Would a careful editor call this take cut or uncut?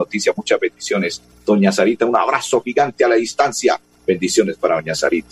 uncut